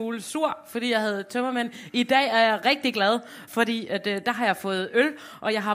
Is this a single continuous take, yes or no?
yes